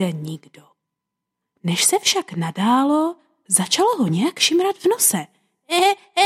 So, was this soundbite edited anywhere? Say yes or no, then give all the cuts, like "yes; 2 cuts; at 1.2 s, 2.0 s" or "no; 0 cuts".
no; 0 cuts